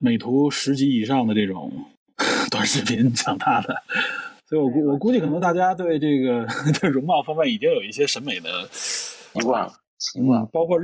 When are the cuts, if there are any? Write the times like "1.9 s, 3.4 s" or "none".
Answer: 9.3 s